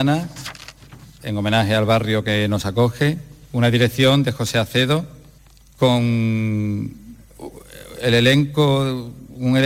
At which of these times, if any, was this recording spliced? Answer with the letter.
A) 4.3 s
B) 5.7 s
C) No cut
C